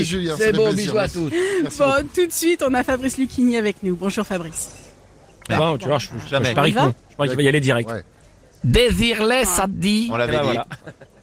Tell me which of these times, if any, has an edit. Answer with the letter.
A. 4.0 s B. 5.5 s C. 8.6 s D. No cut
B